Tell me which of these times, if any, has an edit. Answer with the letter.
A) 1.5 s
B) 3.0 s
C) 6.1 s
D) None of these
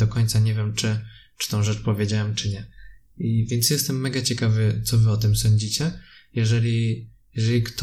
D